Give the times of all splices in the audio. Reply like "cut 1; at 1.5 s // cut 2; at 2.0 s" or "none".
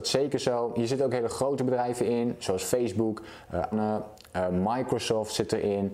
cut 1; at 3.7 s